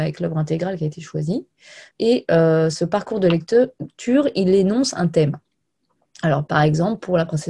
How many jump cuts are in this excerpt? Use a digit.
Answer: 1